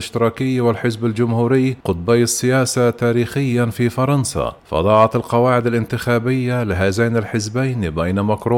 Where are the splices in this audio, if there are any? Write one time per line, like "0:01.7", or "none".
0:01.8
0:04.6